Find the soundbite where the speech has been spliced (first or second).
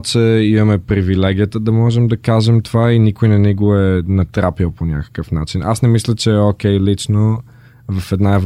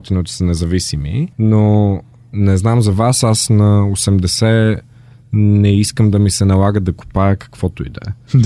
second